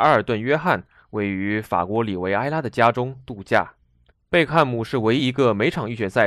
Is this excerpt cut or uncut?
cut